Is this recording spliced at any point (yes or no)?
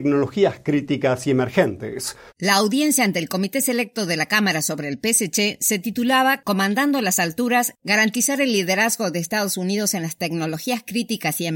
yes